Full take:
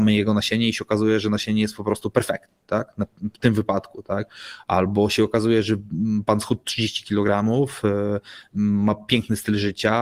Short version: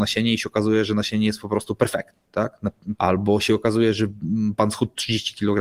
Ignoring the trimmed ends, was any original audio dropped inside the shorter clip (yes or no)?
yes